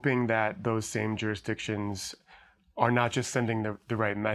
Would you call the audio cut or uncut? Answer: uncut